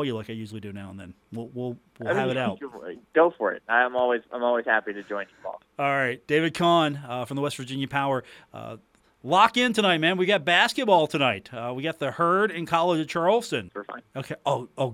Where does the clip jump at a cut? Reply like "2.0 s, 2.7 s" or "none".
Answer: 3.0 s, 13.7 s